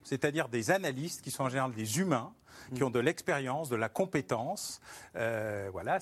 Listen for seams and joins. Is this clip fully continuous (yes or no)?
yes